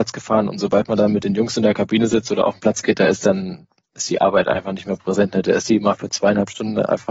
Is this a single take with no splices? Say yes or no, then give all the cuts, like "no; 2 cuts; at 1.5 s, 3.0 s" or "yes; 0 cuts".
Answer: yes; 0 cuts